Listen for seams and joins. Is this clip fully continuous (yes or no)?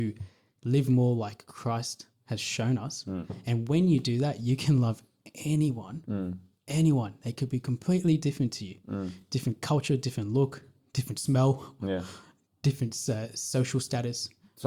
yes